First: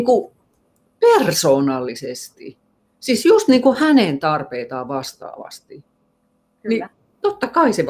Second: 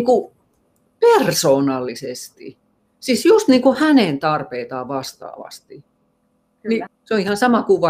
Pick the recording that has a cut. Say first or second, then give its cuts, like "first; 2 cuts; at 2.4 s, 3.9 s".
second; 1 cut; at 6.9 s